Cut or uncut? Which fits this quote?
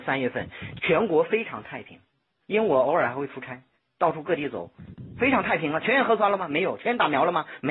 uncut